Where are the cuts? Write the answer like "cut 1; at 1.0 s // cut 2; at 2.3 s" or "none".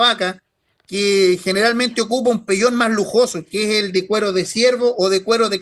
none